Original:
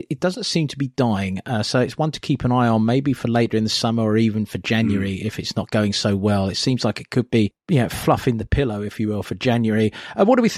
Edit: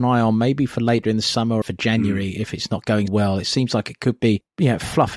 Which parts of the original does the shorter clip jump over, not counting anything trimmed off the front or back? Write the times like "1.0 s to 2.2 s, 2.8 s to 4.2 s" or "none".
4.1 s to 4.5 s, 5.9 s to 6.2 s